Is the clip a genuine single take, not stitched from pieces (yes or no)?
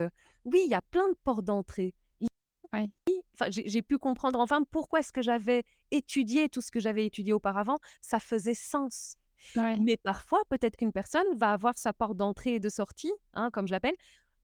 yes